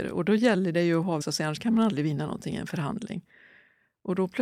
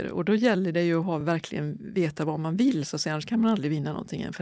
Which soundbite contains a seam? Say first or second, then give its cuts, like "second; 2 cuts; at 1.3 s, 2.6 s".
first; 1 cut; at 1.2 s